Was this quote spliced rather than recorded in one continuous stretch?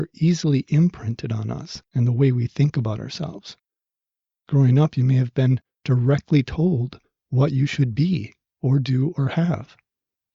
no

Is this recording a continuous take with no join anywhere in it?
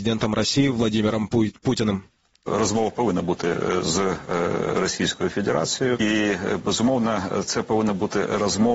yes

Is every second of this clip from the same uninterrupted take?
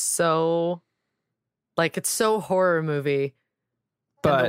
yes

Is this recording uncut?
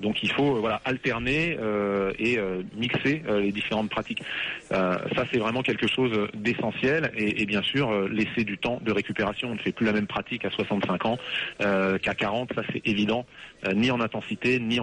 yes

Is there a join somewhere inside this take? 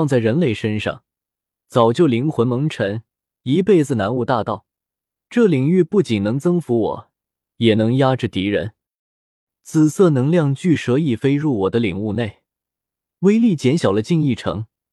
yes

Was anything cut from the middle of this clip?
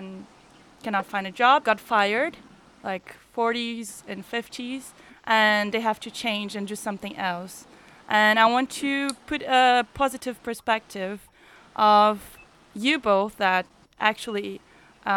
yes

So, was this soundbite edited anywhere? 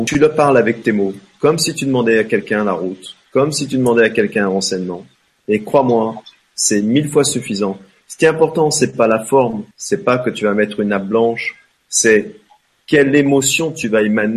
yes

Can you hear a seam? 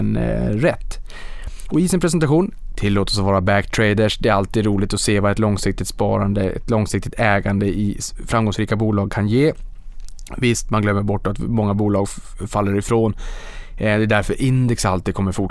no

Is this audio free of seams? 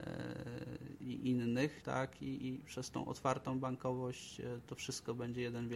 no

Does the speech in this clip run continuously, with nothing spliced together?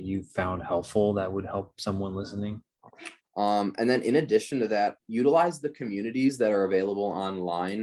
no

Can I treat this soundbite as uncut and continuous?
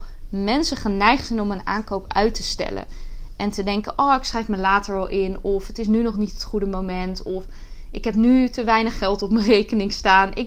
yes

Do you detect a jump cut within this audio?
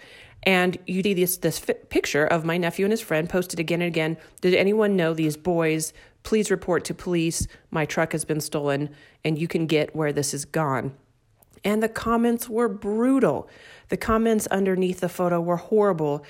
yes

